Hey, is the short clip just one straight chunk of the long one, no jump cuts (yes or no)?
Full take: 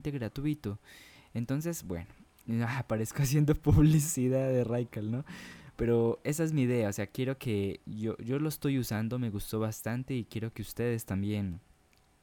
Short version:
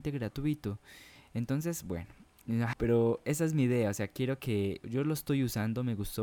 no